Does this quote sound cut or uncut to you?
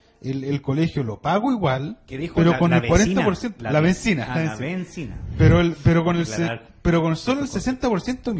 uncut